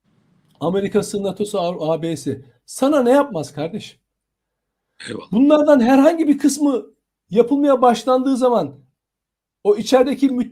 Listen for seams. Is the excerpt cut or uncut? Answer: uncut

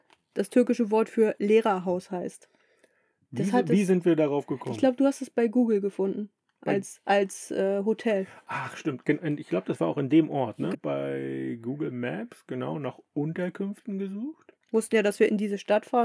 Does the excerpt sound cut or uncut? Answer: cut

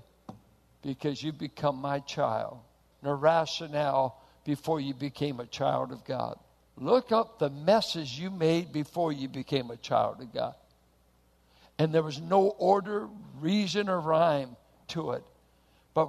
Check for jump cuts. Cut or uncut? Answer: cut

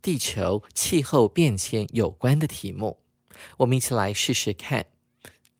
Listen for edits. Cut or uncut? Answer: uncut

